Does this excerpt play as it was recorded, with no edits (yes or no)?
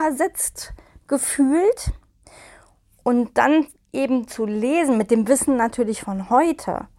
yes